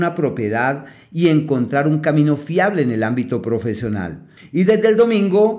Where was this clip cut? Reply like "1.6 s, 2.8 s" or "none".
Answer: 4.4 s